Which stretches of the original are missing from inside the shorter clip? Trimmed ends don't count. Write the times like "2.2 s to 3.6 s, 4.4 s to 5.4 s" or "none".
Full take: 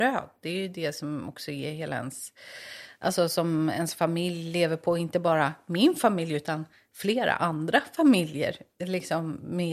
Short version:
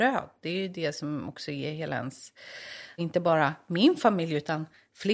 3.0 s to 5.0 s